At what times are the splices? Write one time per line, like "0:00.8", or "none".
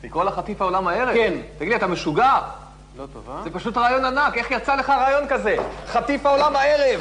none